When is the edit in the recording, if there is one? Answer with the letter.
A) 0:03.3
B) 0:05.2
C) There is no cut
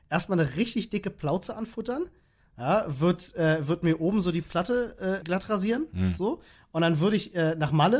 B